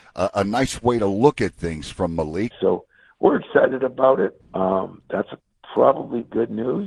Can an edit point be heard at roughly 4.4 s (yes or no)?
yes